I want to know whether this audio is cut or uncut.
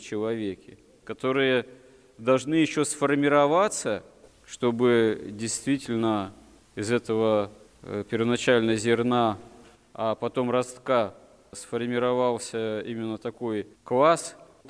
cut